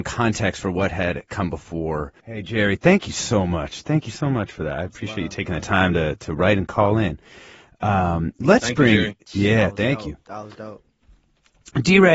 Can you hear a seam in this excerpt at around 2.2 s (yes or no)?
yes